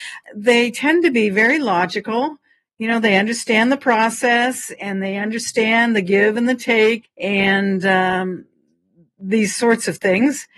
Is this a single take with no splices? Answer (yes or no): no